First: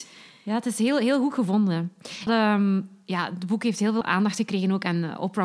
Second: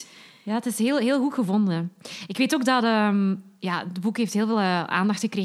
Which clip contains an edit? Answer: first; 2 cuts; at 2.3 s, 4.0 s

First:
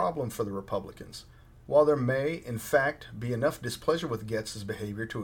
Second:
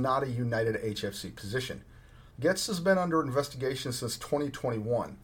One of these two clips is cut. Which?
second; 1 cut; at 2.3 s

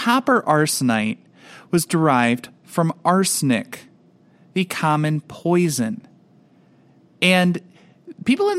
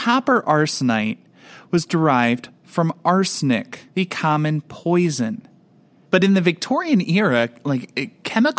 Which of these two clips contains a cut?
second; 2 cuts; at 3.9 s, 6.0 s

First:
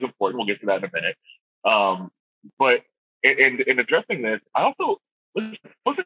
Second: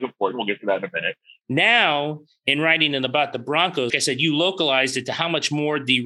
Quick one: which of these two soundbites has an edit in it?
second; 2 cuts; at 1.4 s, 3.9 s

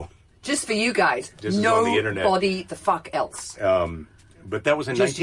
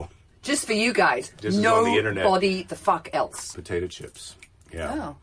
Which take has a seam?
second; 1 cut; at 3.5 s

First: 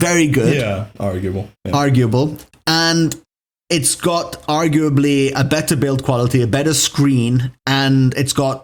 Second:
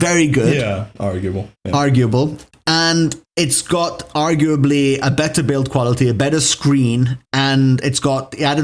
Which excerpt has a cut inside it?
second; 1 cut; at 3.3 s

